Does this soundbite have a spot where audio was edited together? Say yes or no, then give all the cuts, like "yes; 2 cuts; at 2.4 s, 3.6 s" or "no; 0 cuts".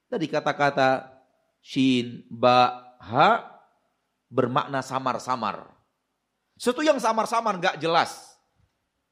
no; 0 cuts